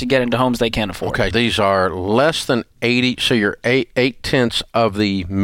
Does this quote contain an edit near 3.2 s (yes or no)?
no